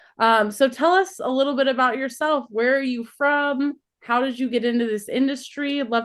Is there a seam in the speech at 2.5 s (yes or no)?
no